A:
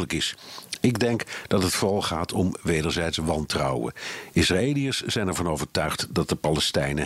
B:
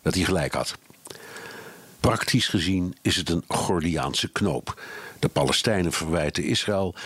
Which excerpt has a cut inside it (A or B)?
B